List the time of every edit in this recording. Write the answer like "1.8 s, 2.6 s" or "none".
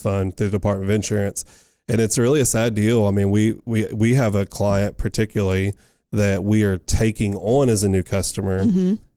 none